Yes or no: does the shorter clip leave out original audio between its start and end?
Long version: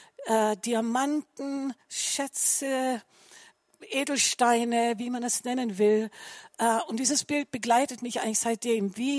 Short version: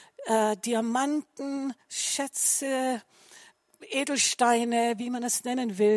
no